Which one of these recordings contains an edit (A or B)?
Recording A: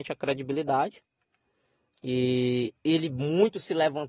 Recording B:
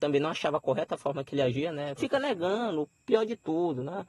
B